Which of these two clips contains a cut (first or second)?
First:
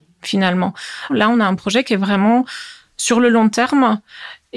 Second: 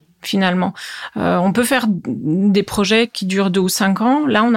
first